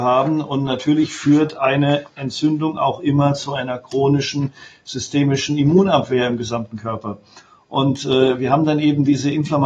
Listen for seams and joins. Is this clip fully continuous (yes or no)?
yes